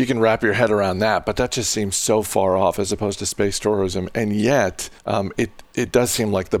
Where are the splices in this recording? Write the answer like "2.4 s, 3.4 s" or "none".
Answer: 5.0 s